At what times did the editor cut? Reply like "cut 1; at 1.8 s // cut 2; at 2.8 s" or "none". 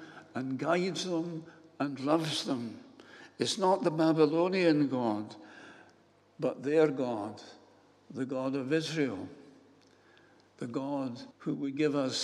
cut 1; at 11.3 s